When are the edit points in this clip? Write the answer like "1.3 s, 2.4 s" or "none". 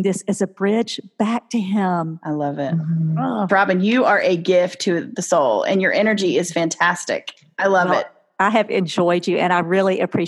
3.5 s